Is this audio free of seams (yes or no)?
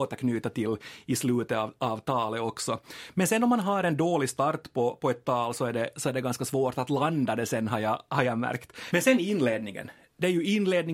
no